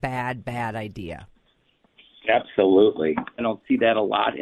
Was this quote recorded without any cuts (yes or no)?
no